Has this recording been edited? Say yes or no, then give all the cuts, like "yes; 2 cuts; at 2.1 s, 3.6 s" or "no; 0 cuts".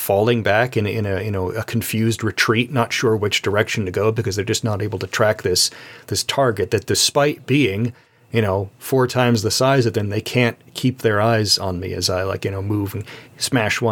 no; 0 cuts